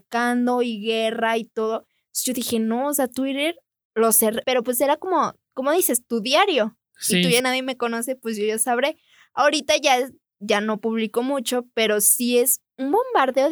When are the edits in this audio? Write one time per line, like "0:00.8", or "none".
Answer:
0:04.4
0:07.4